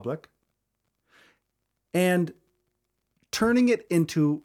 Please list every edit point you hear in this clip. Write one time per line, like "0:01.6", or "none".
none